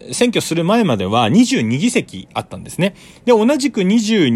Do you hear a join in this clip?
no; 0 cuts

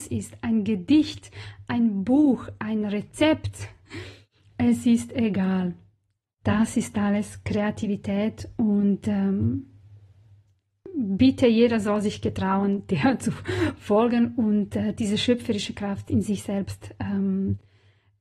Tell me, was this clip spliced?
no; 0 cuts

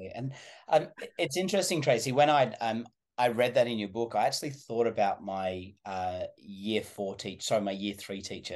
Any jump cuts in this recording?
no; 0 cuts

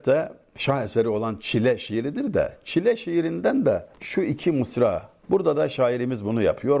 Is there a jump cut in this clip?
yes; 2 cuts; at 3.9 s, 5.2 s

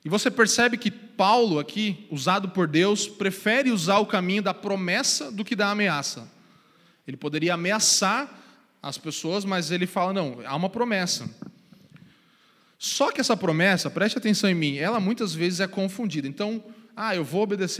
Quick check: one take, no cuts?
yes; 0 cuts

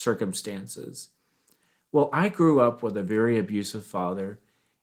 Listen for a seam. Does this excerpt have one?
no; 0 cuts

